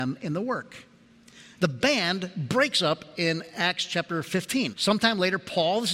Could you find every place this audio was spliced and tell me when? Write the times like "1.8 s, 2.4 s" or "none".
1.5 s, 4.7 s